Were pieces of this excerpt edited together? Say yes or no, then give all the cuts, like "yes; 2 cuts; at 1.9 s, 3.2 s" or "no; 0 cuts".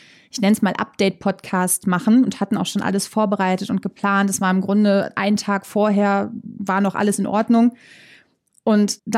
no; 0 cuts